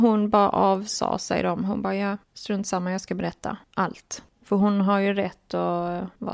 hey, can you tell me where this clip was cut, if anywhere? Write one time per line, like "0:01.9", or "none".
none